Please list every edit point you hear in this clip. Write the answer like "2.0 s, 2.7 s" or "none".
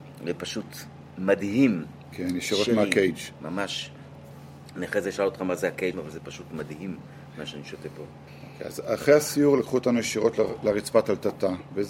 5.9 s